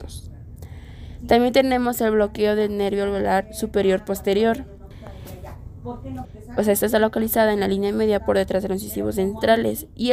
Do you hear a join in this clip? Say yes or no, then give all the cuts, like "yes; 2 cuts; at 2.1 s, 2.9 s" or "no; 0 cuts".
yes; 1 cut; at 6.2 s